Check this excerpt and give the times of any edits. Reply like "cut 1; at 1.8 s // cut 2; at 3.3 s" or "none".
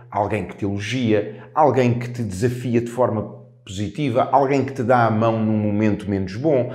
none